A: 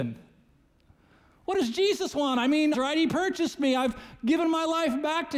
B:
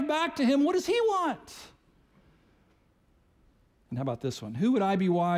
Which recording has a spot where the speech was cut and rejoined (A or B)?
A